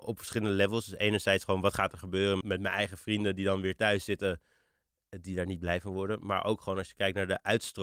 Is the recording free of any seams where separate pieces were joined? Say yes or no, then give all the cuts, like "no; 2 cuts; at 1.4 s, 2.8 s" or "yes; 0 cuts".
no; 1 cut; at 2.4 s